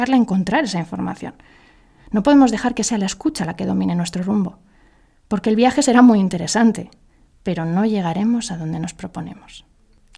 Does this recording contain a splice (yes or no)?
no